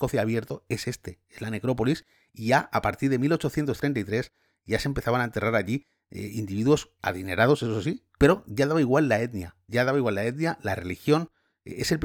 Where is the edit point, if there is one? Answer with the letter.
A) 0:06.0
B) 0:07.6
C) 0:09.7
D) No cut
C